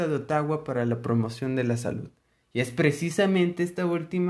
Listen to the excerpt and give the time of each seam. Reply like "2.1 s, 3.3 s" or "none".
none